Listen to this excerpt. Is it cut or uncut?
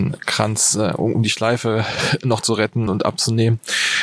cut